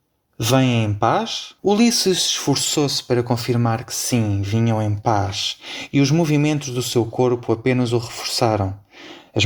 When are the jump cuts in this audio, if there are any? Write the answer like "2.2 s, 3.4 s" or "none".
1.6 s